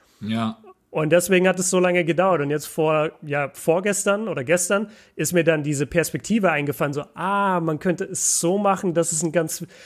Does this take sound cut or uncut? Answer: uncut